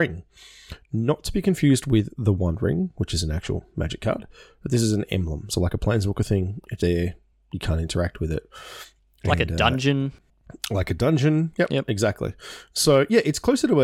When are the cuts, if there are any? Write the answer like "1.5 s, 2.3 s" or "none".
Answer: 6.8 s